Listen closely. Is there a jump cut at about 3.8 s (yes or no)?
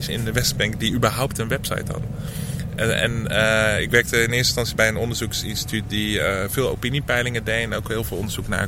no